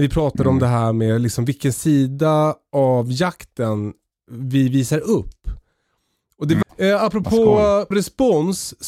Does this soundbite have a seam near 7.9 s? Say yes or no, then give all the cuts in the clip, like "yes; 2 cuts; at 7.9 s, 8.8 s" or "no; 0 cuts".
yes; 2 cuts; at 6.6 s, 7.9 s